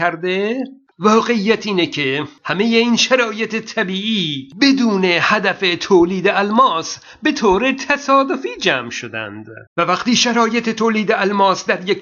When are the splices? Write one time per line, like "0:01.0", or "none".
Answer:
0:09.7